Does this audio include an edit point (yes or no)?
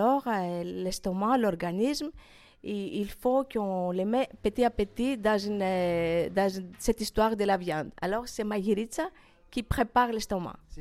no